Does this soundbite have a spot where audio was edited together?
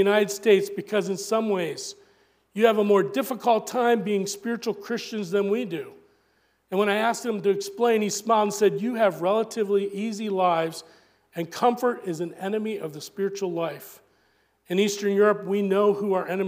no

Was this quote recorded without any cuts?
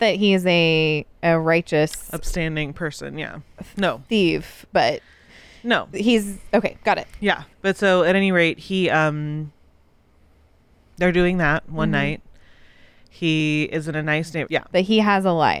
no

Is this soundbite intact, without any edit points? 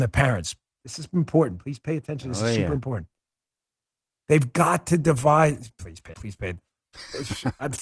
no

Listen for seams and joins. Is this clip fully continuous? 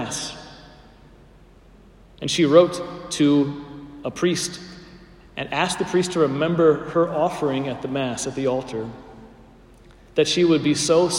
yes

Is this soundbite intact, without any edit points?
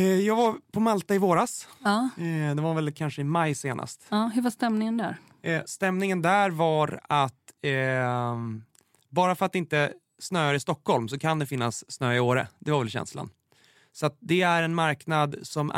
yes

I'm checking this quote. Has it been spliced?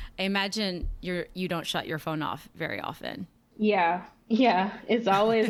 no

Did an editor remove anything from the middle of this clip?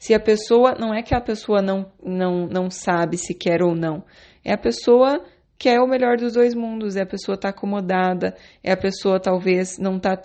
no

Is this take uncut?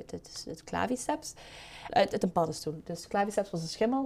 no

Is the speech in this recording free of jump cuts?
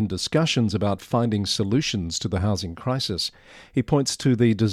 yes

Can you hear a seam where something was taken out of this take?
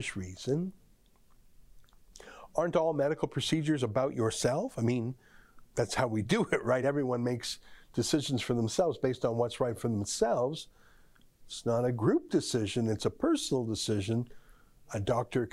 no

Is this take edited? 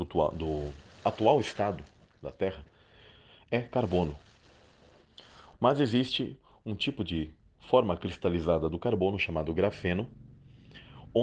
yes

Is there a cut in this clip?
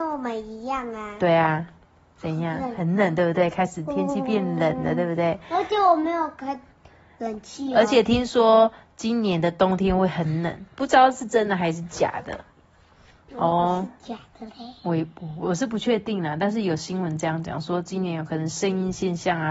yes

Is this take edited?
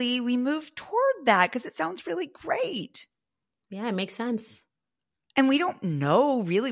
no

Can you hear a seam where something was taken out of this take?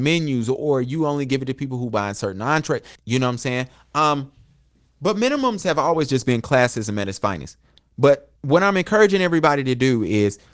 yes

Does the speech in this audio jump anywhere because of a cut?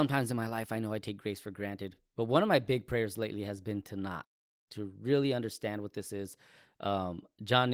no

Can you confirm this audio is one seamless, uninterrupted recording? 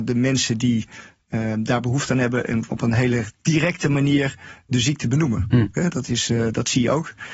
no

